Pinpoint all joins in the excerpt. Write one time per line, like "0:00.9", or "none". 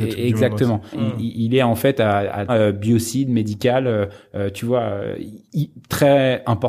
0:00.9
0:02.5